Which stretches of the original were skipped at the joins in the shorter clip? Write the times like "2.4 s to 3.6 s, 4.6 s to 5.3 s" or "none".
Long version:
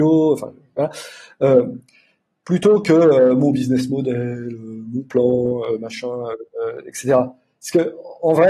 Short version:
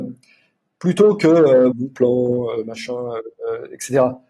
3.4 s to 4.8 s